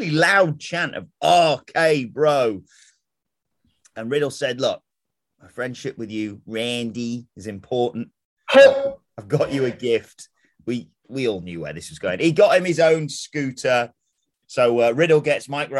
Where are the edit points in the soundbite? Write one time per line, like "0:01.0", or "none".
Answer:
0:14.4

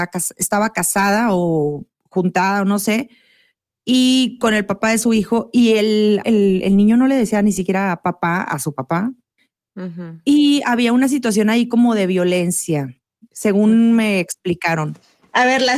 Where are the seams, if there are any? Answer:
0:06.2

